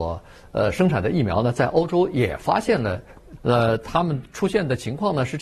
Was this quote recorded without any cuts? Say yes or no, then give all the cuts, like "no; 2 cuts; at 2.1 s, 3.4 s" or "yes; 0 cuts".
no; 1 cut; at 3.4 s